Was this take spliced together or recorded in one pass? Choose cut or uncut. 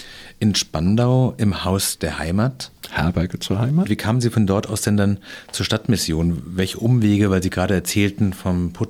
cut